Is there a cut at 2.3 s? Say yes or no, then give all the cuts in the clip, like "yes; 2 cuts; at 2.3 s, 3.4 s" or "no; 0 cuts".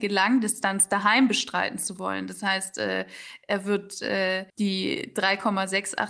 no; 1 cut; at 4.5 s